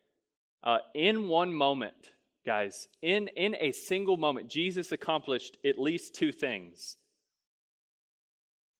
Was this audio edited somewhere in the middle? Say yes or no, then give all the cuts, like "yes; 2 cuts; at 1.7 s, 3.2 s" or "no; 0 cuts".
no; 0 cuts